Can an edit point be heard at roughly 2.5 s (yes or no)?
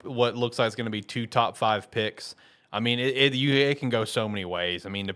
no